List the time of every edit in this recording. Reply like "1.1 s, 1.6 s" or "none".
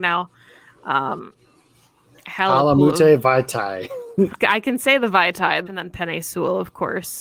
4.4 s, 5.7 s